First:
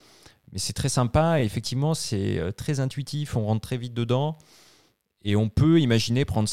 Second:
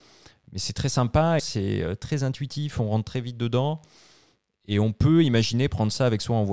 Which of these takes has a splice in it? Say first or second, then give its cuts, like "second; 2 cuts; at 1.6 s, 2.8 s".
second; 1 cut; at 1.4 s